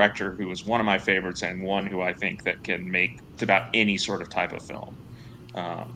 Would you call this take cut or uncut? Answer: cut